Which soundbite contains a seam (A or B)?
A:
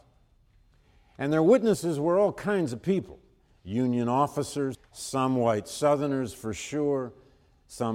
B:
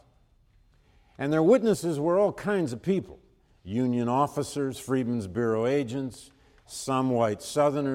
A